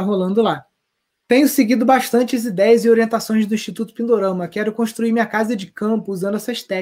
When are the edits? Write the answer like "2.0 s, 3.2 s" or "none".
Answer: none